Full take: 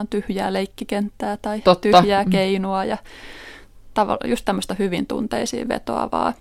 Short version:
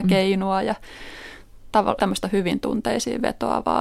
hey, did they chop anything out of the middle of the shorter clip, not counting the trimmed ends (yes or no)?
yes